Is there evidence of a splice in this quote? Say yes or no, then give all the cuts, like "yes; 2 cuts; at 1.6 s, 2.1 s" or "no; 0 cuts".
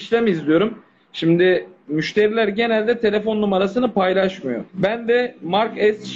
yes; 1 cut; at 4.7 s